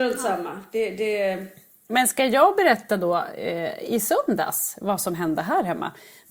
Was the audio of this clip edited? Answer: no; 0 cuts

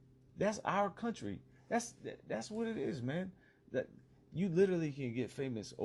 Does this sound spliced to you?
no; 0 cuts

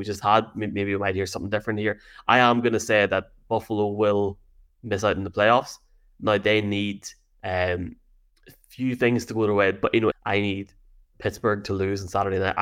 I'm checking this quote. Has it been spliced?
yes; 1 cut; at 10.1 s

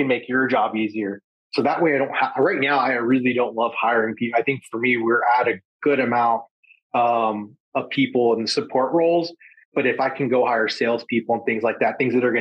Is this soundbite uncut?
yes; 0 cuts

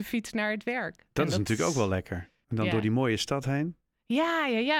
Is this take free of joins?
no; 1 cut; at 2.4 s

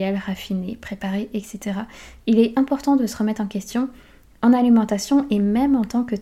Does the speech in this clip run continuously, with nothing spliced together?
no; 1 cut; at 2.2 s

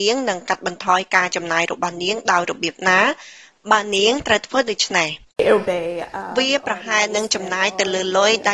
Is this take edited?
yes; 1 cut; at 5.6 s

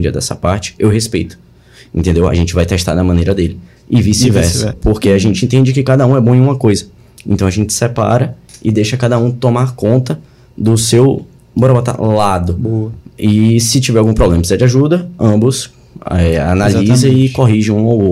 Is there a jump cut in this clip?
yes; 1 cut; at 4.7 s

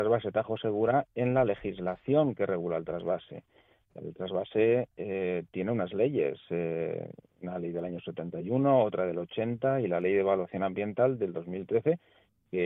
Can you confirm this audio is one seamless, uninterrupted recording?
yes; 0 cuts

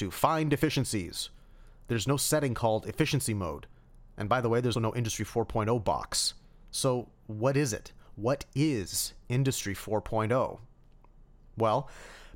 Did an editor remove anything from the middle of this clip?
yes; 1 cut; at 4.7 s

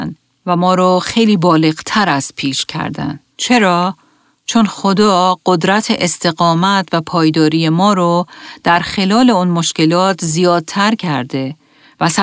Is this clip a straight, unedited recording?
no; 1 cut; at 3.3 s

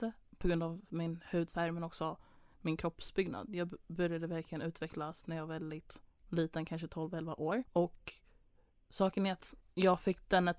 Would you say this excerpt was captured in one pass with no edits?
no; 1 cut; at 7.7 s

